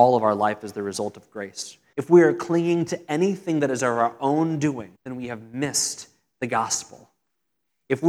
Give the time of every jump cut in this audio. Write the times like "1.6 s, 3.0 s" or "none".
1.9 s, 5.0 s